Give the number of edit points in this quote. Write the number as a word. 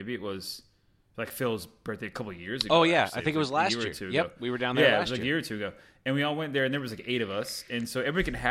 zero